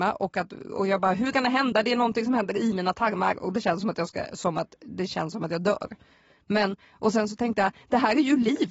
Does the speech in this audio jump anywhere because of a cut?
no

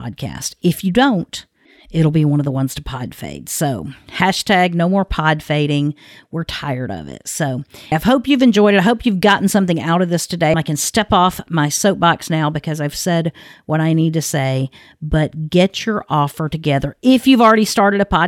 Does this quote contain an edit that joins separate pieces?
yes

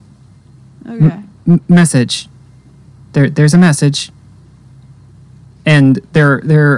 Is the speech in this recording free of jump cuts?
yes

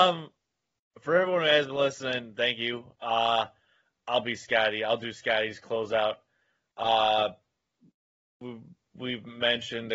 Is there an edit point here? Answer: no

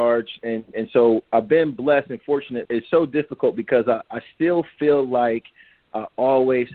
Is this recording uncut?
no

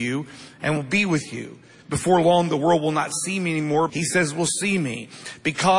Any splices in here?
yes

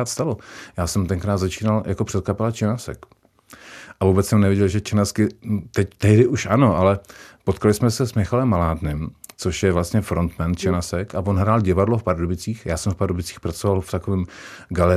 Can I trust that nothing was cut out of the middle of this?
yes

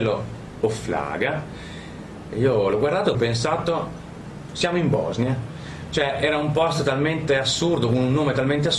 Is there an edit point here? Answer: yes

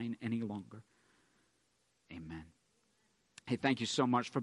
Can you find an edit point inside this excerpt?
yes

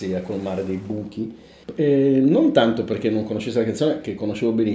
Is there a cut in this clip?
yes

